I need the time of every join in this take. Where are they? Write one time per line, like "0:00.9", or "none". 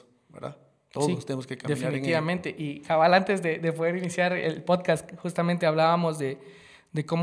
none